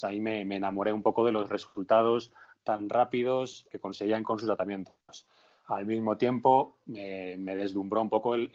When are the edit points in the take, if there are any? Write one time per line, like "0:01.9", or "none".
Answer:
0:03.7